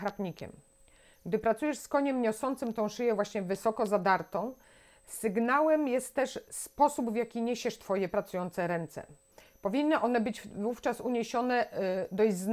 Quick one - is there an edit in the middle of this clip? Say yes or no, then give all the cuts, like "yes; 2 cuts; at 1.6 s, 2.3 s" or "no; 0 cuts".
no; 0 cuts